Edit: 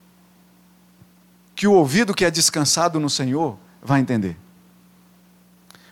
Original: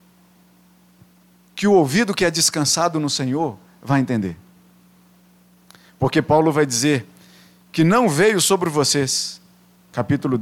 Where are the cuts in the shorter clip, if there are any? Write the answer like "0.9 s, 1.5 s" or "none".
none